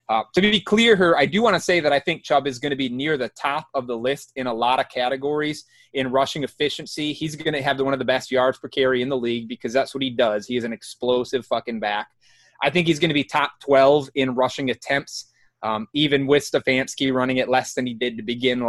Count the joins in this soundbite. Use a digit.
0